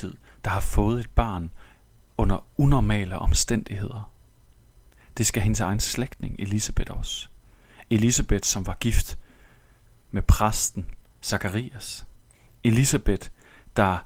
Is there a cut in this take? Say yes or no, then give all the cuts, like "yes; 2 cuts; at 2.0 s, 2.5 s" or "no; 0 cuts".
no; 0 cuts